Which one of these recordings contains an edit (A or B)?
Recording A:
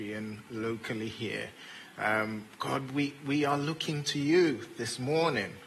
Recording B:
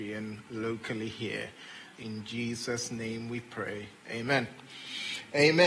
B